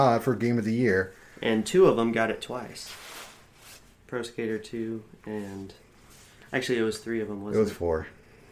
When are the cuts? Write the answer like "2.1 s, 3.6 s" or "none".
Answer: none